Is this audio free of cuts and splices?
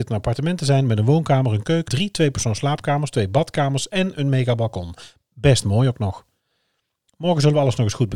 no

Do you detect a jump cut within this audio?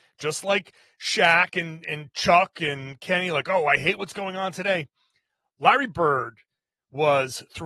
no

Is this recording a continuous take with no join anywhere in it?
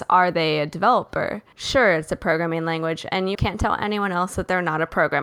no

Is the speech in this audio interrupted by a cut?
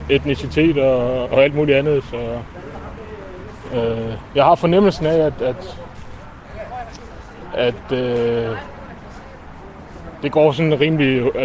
yes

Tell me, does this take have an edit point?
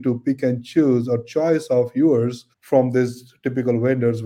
yes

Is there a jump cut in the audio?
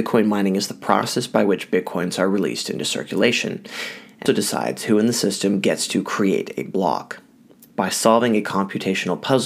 yes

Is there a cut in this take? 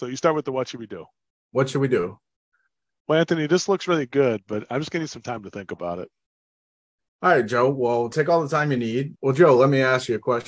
yes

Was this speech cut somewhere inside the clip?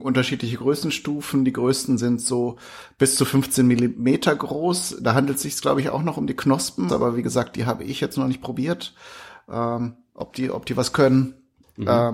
yes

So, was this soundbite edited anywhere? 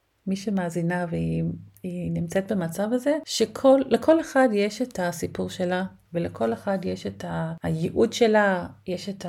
no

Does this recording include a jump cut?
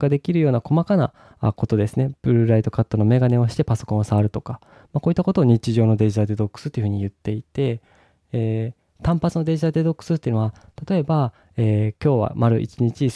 no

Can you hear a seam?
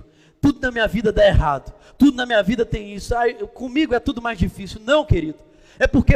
no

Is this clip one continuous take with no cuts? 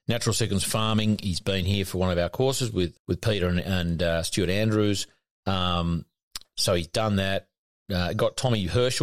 no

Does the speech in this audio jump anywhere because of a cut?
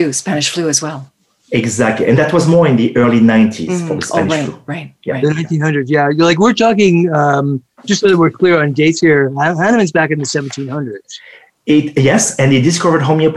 no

